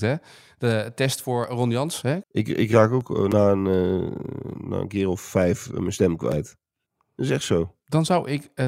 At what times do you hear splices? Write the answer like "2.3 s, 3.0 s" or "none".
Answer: 2.2 s